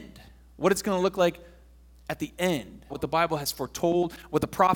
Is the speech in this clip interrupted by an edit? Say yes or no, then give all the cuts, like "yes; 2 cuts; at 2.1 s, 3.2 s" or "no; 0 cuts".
yes; 1 cut; at 2.9 s